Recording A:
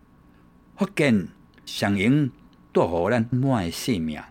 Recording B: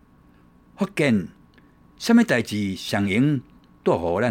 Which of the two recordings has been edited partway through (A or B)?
A